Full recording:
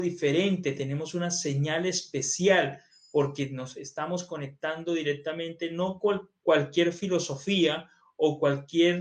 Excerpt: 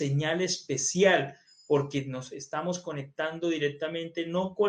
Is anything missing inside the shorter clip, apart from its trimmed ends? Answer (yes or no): no